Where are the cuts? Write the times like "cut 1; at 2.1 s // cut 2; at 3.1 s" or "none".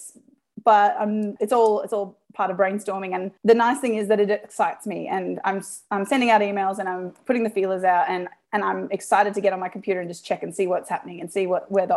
cut 1; at 1.4 s // cut 2; at 3.4 s